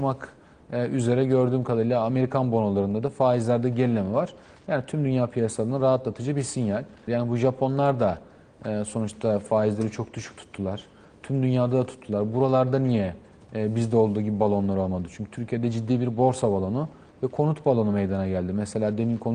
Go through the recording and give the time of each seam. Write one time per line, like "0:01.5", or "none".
0:07.1